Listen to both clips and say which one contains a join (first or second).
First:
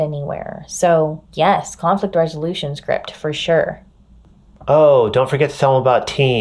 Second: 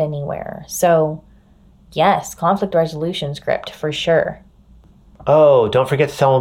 first